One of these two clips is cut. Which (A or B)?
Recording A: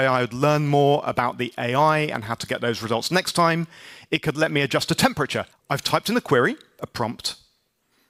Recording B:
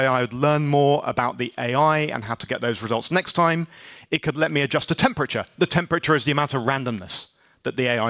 A